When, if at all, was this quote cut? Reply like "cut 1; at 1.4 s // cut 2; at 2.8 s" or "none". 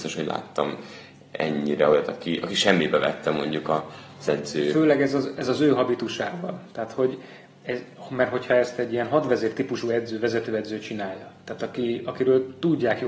none